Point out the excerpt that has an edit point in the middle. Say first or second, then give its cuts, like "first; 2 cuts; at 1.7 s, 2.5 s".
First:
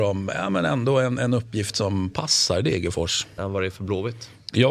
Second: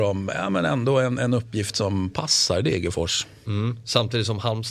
first; 1 cut; at 3.4 s